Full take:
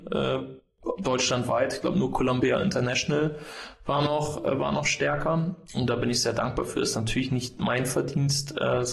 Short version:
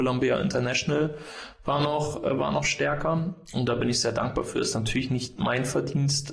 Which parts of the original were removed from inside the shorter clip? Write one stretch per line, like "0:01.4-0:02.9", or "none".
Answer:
none